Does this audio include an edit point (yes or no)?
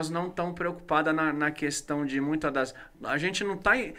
yes